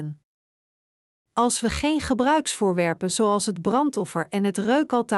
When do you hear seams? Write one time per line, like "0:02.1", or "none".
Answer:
0:01.1